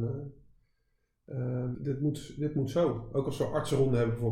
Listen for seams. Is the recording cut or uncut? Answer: cut